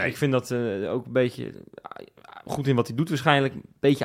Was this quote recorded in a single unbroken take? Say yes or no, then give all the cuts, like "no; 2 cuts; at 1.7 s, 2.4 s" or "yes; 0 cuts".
no; 1 cut; at 2.5 s